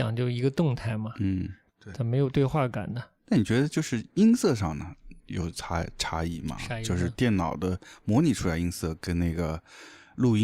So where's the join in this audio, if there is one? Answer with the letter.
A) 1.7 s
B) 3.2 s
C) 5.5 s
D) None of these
A